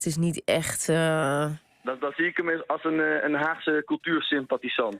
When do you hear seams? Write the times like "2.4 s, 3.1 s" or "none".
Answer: none